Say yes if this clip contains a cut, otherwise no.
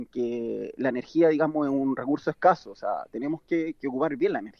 no